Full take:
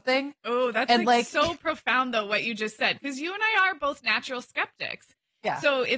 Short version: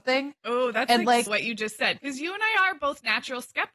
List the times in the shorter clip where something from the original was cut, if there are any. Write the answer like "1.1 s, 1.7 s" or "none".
1.3 s